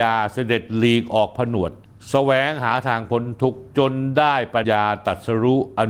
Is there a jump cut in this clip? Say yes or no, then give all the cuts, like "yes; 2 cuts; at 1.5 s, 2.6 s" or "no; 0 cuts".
yes; 1 cut; at 4.6 s